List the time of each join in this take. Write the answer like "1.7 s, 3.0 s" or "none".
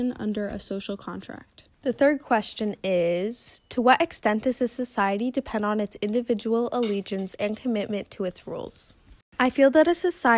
1.7 s